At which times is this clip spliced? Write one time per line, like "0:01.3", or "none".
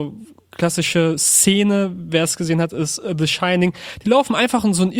none